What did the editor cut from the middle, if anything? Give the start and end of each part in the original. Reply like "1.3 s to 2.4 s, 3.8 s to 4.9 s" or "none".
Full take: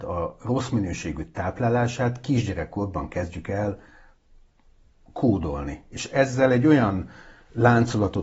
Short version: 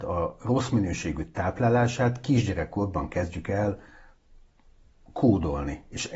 none